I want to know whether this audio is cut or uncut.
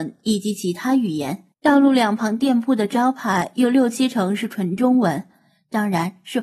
cut